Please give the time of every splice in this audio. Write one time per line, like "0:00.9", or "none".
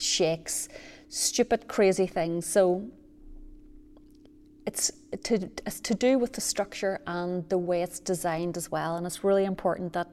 none